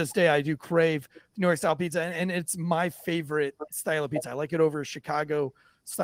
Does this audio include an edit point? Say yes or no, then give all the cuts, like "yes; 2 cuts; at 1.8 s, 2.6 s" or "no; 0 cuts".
no; 0 cuts